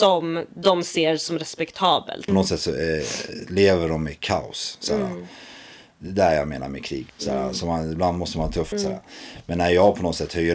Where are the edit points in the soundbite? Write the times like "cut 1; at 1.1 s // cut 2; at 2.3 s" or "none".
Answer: cut 1; at 2.3 s // cut 2; at 7.1 s // cut 3; at 8.7 s